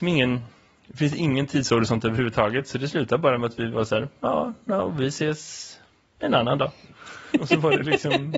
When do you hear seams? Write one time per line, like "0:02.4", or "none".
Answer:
none